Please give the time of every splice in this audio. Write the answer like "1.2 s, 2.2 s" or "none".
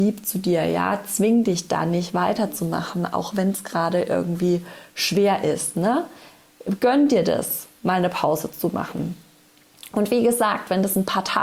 none